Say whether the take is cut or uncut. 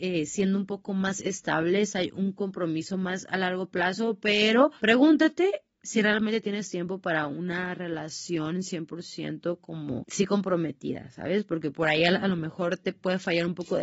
uncut